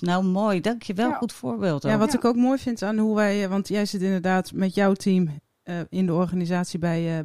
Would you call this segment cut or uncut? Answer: uncut